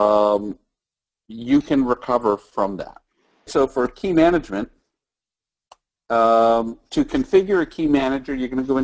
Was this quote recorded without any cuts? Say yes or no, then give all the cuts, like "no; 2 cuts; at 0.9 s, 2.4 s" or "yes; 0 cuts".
no; 1 cut; at 3.5 s